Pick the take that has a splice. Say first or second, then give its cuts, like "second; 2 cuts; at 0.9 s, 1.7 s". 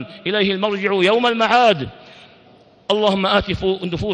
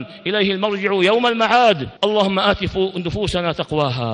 second; 1 cut; at 2.0 s